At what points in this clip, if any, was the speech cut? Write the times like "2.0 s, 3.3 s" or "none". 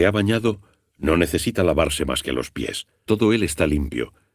3.1 s